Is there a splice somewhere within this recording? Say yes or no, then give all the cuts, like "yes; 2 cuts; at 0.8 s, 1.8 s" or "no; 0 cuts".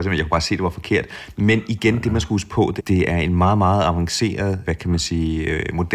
yes; 2 cuts; at 2.8 s, 4.6 s